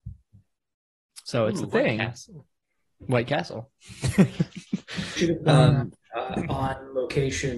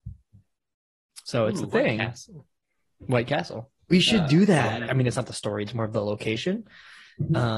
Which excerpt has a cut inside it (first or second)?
second